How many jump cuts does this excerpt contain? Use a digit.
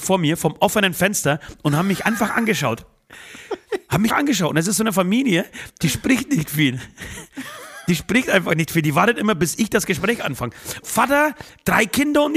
2